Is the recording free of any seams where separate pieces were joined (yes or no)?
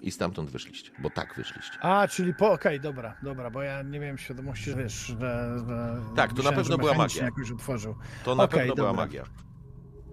no